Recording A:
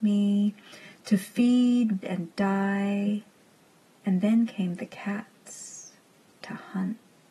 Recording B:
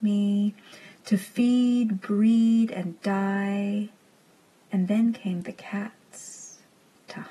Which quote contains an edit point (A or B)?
A